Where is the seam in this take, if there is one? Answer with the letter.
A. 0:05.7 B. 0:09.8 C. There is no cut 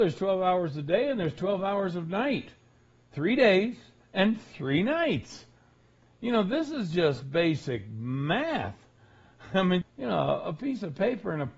B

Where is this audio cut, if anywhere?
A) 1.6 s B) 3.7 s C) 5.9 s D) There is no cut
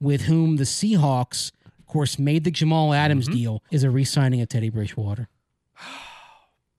B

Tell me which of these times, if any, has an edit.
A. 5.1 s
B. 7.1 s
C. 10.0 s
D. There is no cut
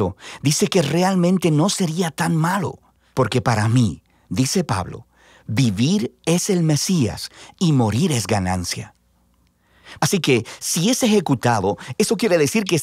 C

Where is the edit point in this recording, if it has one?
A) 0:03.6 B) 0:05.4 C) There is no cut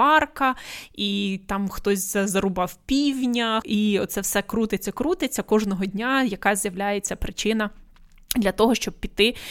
A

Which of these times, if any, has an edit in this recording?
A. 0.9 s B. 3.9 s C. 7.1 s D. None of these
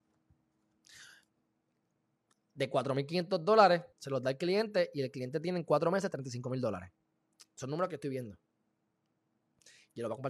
B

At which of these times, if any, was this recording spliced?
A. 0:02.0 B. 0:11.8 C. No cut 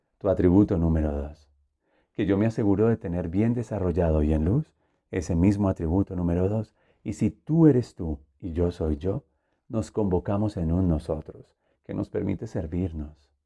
B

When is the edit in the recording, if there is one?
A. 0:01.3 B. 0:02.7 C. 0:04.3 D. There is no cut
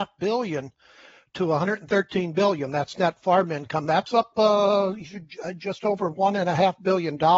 D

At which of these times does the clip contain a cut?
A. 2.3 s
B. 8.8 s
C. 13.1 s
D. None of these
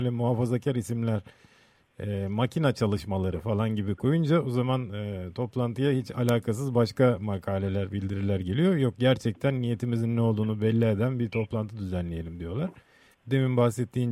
C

